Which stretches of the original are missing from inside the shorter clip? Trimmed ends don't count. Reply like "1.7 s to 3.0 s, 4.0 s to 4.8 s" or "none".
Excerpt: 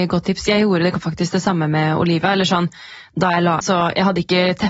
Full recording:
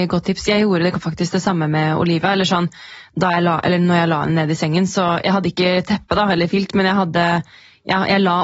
3.6 s to 4.9 s